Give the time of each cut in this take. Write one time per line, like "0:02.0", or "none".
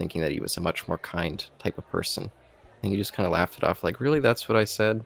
0:02.8